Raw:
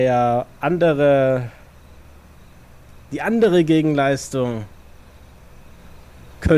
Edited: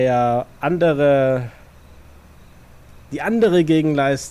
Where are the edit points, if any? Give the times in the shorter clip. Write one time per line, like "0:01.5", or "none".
none